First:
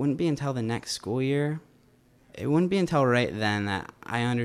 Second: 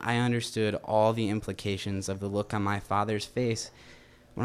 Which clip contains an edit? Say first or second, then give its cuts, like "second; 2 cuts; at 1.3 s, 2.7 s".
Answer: first; 1 cut; at 2.2 s